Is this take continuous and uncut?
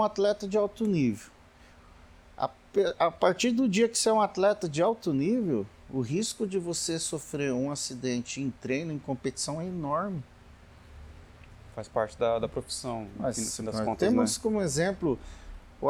yes; 0 cuts

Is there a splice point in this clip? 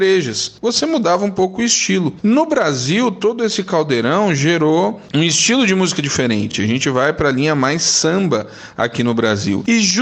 no; 0 cuts

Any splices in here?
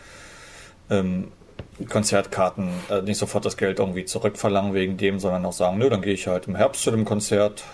yes; 1 cut; at 1.9 s

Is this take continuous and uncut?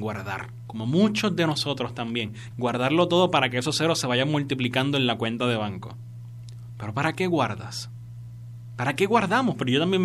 no; 1 cut; at 2.5 s

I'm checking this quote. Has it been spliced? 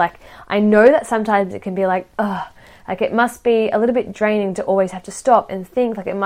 no; 0 cuts

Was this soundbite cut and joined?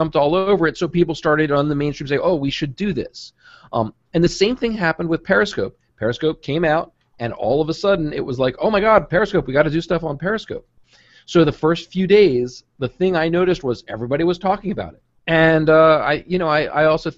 yes; 1 cut; at 15.2 s

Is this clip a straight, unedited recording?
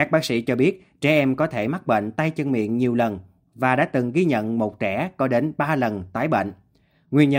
yes; 0 cuts

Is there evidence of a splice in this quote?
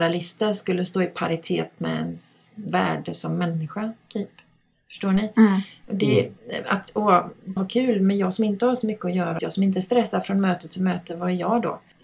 yes; 2 cuts; at 7.6 s, 9.4 s

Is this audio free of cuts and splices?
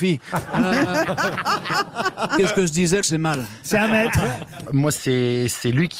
no; 2 cuts; at 3.0 s, 4.7 s

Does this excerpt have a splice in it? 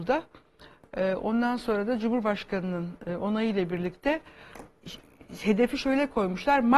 no; 0 cuts

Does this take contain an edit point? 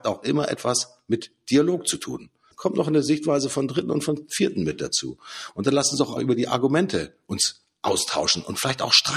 yes; 2 cuts; at 2.5 s, 6.2 s

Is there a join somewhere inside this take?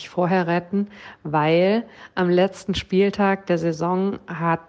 no; 0 cuts

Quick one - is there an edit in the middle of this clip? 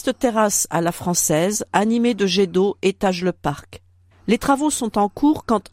no; 0 cuts

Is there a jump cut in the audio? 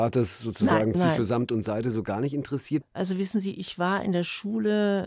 yes; 2 cuts; at 0.9 s, 2.8 s

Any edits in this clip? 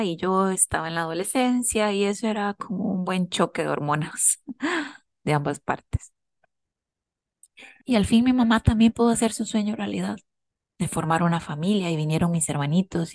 yes; 1 cut; at 7.8 s

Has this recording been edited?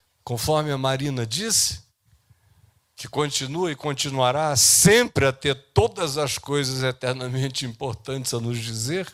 no; 0 cuts

